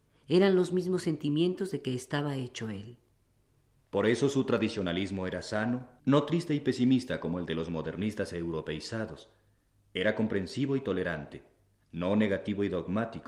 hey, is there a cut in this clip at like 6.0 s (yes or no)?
yes